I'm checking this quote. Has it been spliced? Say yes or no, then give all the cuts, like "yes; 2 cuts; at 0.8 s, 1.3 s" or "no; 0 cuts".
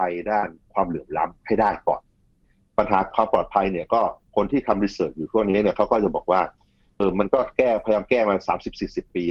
yes; 1 cut; at 7.0 s